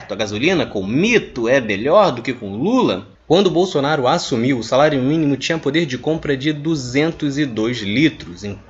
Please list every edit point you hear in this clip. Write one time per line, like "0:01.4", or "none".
0:03.1